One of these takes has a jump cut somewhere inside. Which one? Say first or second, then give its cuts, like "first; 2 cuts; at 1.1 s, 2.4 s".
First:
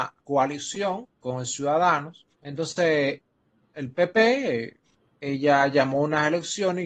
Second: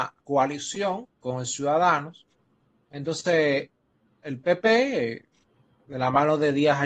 first; 2 cuts; at 2.3 s, 5.1 s